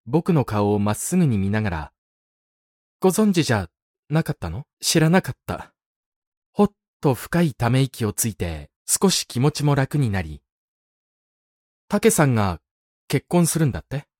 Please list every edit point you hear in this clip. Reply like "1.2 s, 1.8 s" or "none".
4.7 s, 6.4 s

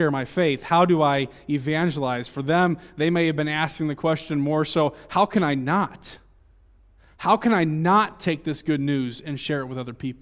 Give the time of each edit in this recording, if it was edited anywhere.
none

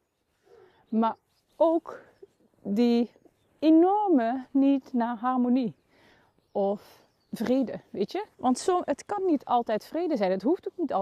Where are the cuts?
8.3 s

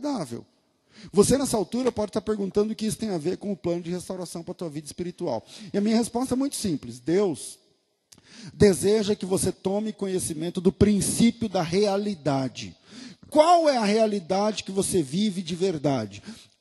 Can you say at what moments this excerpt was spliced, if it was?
none

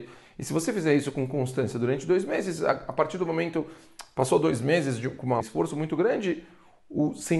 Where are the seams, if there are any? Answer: 5.4 s

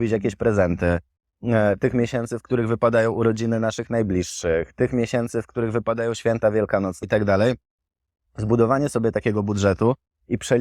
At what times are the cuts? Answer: 7.0 s

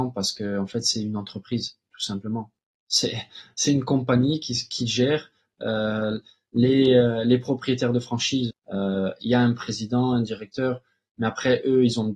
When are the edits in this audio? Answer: 8.5 s

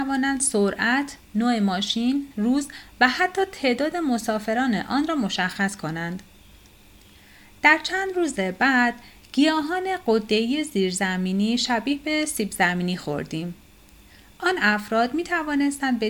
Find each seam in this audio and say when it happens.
2.3 s

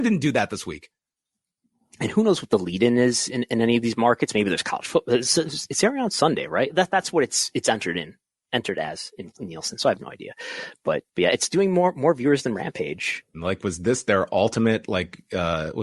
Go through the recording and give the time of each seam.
11.1 s, 13.3 s

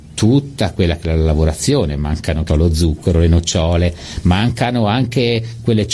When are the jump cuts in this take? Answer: 2.5 s, 4.2 s

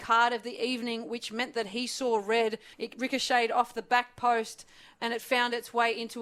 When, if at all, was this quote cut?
2.7 s

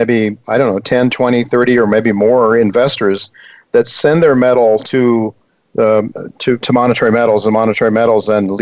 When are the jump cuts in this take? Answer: 6.6 s

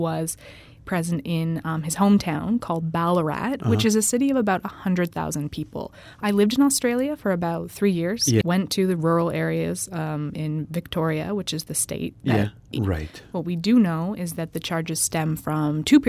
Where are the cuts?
8.4 s, 12.7 s

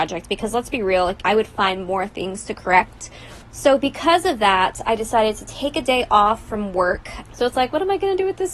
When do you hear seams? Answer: 1.2 s, 3.4 s, 7.2 s

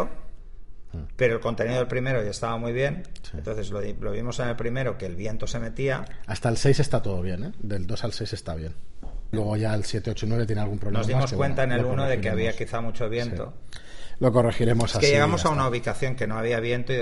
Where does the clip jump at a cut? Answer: 9.3 s

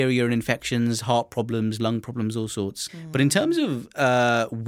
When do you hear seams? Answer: 2.9 s

